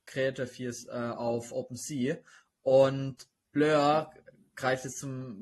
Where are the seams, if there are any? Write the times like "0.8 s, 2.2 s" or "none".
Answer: none